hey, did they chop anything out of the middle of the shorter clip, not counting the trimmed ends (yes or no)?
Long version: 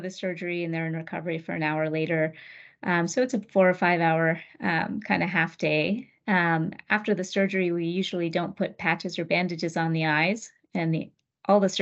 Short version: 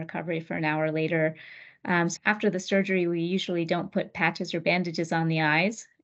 yes